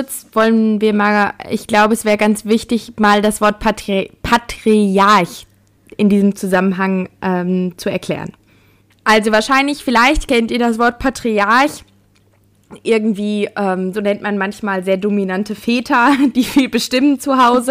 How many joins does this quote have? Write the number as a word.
two